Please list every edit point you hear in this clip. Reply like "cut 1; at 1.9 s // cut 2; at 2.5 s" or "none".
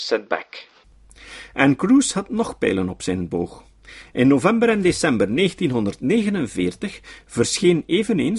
none